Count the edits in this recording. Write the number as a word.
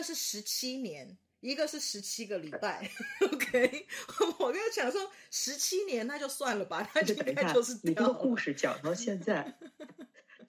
zero